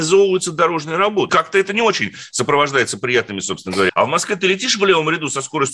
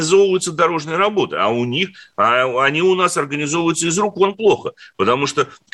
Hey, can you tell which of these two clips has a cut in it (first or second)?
first